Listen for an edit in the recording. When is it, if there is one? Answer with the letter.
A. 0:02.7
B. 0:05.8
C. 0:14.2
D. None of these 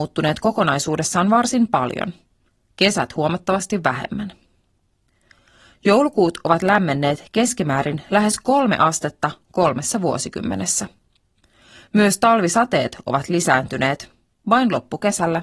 D